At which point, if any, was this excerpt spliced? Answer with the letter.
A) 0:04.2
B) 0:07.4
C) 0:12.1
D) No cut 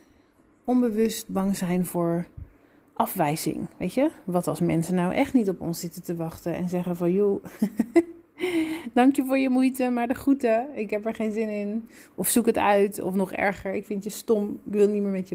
D